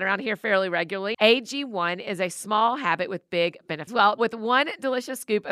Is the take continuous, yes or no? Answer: no